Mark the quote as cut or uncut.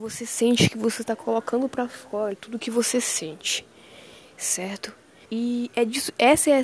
cut